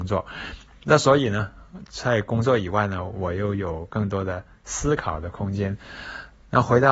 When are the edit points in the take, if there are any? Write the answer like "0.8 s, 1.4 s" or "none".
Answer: none

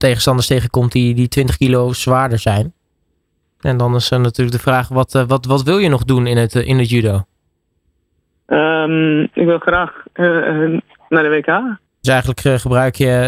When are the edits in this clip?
3.4 s, 11.9 s

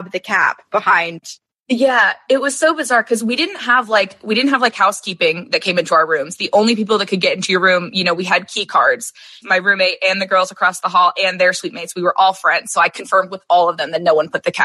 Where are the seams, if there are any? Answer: 9.4 s

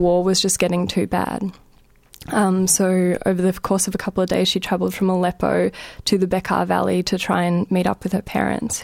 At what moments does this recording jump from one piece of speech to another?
none

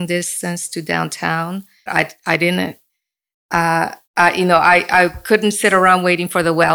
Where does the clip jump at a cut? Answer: 1.9 s, 4.0 s

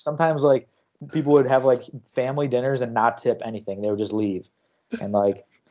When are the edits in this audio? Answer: none

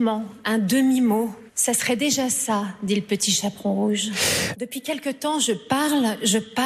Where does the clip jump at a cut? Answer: 1.5 s, 4.5 s

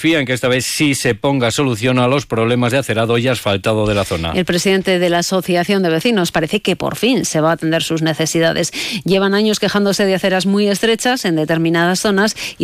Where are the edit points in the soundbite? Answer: 6.3 s

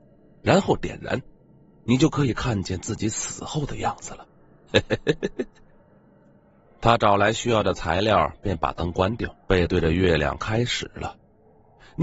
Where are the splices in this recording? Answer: 4.7 s, 9.4 s

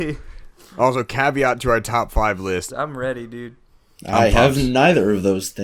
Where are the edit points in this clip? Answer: 2.7 s

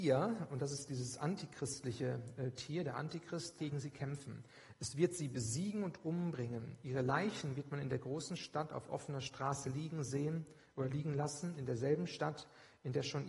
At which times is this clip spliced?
3.6 s

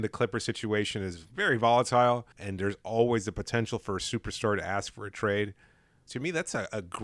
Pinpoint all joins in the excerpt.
2.3 s, 6.1 s

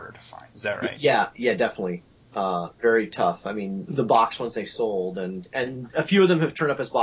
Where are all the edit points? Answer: 3.9 s

